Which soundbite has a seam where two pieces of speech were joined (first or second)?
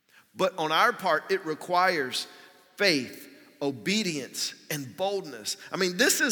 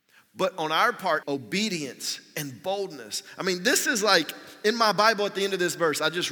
second